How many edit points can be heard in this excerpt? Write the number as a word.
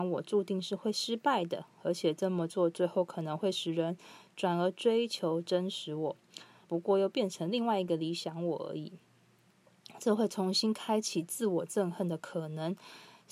one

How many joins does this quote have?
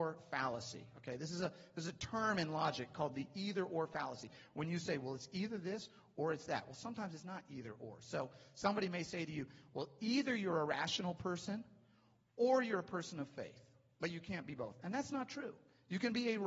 zero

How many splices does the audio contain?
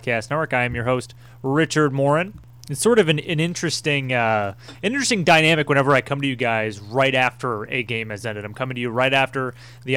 zero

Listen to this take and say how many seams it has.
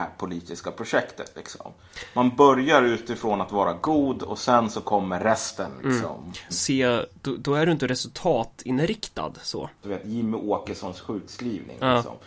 two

